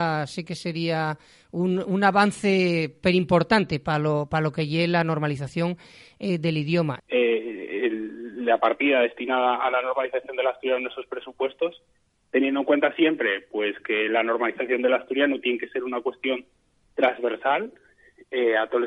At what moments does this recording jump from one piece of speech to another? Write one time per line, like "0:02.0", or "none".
0:07.0